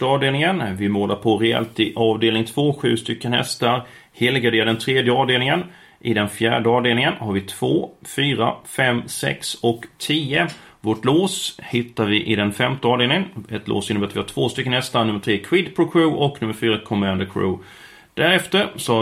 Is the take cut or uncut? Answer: uncut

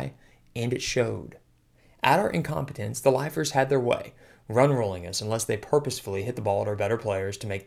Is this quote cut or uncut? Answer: uncut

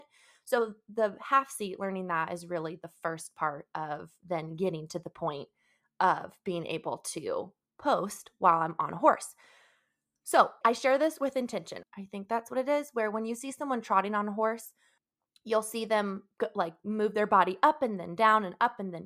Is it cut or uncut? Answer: cut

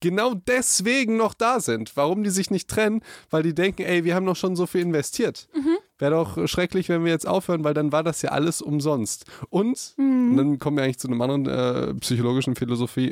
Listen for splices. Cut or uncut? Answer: uncut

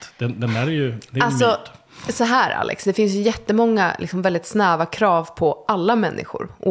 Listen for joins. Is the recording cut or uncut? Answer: uncut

